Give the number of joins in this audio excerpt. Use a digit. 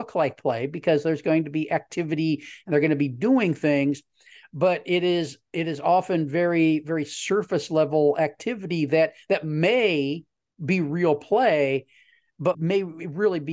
1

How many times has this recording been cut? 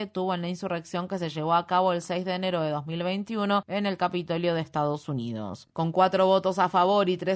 0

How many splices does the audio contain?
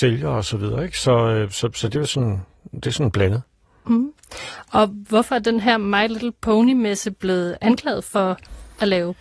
0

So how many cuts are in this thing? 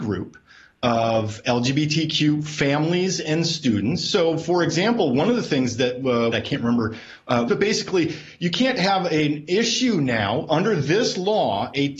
2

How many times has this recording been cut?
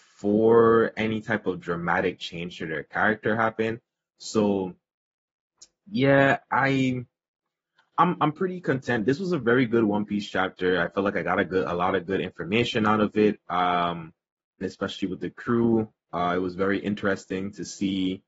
2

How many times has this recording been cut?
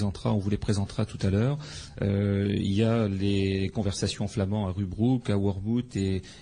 0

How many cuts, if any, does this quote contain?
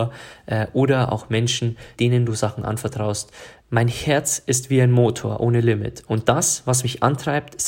2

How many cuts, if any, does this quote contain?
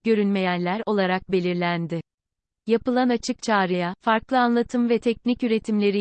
0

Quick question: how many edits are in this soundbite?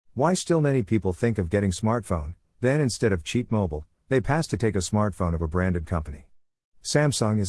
0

